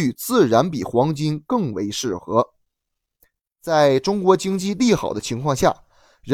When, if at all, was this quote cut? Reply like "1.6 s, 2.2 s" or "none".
3.4 s